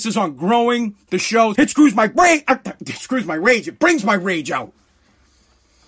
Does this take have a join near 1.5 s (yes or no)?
yes